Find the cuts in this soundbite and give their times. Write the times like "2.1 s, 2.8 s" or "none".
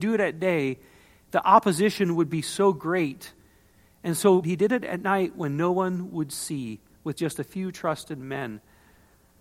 4.4 s